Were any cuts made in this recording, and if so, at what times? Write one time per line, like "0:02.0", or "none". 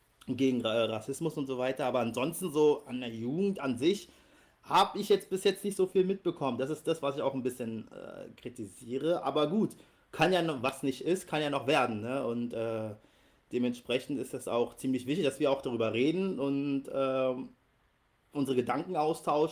none